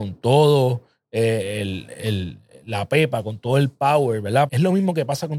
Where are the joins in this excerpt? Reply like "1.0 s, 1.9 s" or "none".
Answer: 4.5 s